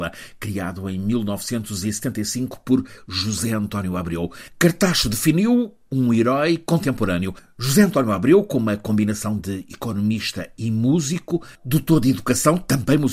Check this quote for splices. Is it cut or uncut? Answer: uncut